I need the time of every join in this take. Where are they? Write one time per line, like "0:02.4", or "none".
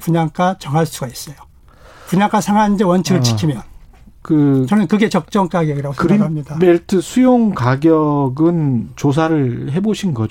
none